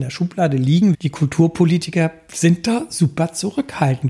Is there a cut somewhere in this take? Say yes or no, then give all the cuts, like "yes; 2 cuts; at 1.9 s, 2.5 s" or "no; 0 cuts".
yes; 1 cut; at 0.9 s